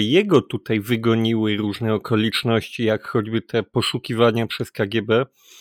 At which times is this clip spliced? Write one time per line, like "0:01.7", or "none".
none